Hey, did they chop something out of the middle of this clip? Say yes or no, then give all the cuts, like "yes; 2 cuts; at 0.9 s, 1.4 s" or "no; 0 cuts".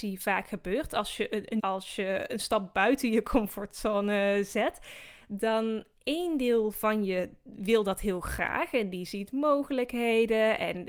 yes; 1 cut; at 1.6 s